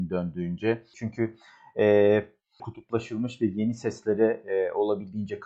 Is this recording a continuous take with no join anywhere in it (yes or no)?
no